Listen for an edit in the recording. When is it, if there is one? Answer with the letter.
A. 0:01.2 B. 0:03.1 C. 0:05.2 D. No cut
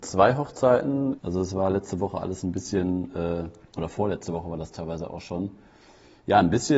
A